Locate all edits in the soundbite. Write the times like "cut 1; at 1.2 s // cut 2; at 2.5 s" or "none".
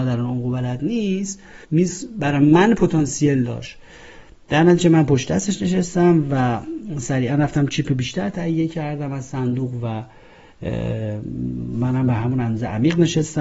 cut 1; at 1.6 s